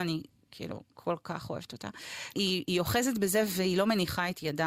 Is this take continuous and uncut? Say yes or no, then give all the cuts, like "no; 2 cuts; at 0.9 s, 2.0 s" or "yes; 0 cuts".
no; 1 cut; at 2.3 s